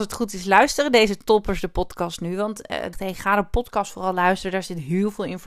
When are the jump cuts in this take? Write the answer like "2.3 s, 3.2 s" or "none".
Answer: 2.9 s